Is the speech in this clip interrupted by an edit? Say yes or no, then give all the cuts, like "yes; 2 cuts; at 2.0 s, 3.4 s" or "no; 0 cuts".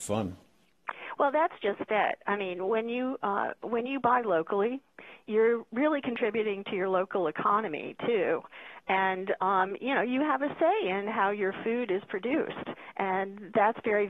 no; 0 cuts